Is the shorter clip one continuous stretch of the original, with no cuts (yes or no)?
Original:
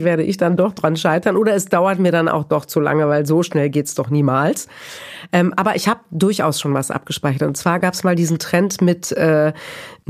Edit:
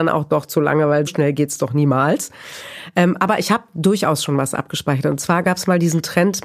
no